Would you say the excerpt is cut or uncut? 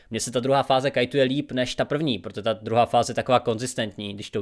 uncut